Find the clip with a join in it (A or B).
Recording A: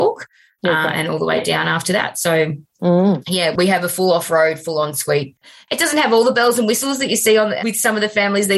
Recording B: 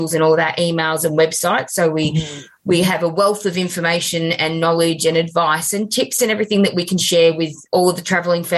A